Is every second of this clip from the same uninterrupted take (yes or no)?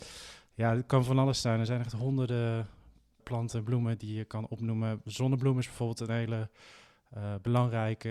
yes